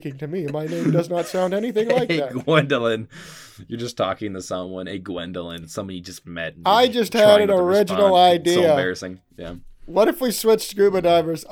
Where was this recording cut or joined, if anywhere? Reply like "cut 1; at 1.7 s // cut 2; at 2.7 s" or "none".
cut 1; at 9.3 s